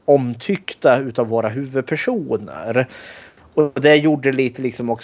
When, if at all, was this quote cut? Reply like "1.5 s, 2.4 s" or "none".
none